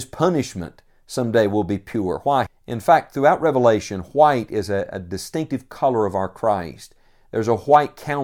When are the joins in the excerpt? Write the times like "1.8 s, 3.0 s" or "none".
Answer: 2.5 s